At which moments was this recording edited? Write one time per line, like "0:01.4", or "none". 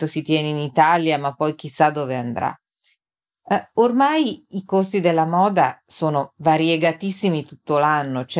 none